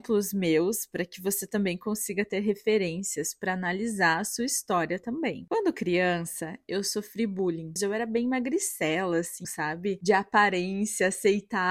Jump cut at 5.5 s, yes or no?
no